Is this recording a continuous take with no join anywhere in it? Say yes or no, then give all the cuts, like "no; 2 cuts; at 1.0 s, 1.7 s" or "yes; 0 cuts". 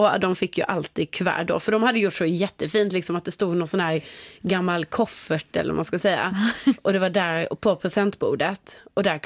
yes; 0 cuts